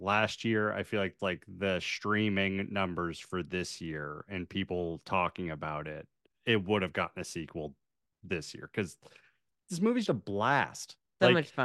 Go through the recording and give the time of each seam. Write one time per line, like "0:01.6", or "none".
0:01.2
0:10.1

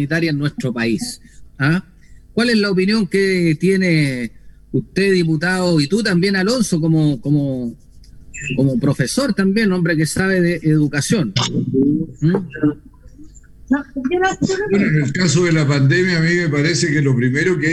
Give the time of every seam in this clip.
0:01.4

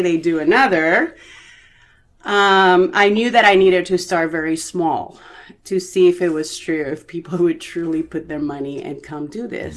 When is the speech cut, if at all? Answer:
none

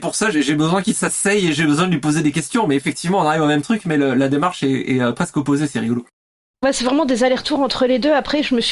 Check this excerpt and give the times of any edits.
none

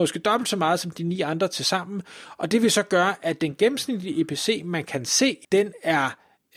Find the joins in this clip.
0:05.4

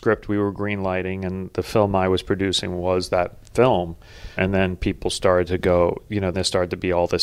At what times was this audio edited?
0:04.4
0:06.3

